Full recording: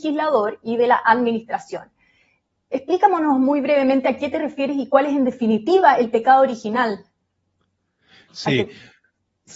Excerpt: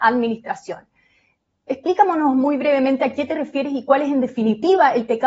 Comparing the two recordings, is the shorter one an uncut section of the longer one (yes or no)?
yes